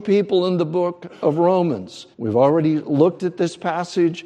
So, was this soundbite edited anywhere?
yes; 1 cut; at 2.1 s

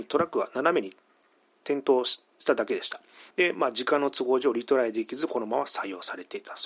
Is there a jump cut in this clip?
no; 0 cuts

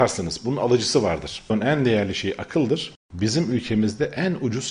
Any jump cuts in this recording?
no; 0 cuts

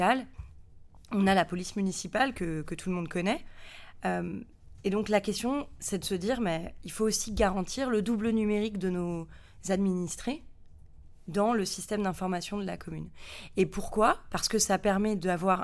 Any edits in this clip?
no; 0 cuts

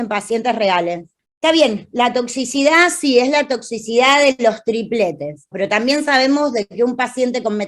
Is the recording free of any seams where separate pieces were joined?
no; 2 cuts; at 1.2 s, 5.5 s

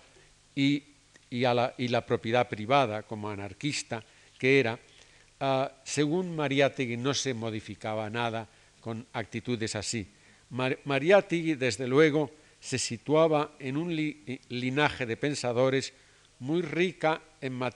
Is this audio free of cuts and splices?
yes; 0 cuts

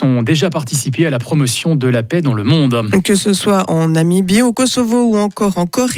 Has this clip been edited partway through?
no; 0 cuts

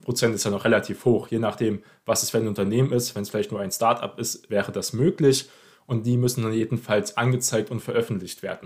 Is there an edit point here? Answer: no; 0 cuts

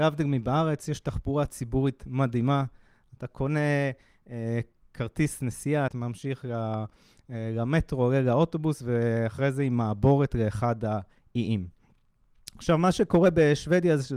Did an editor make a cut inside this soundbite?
yes; 1 cut; at 5.9 s

